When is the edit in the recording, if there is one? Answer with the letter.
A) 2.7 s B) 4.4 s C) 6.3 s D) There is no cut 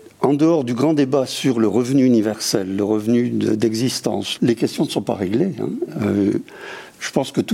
B